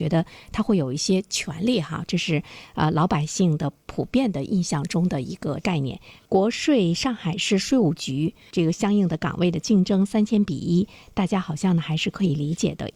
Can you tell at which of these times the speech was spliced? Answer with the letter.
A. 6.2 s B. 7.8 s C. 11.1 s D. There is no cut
A